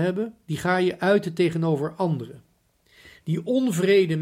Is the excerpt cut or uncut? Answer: uncut